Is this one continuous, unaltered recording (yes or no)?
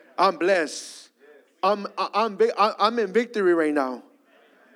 yes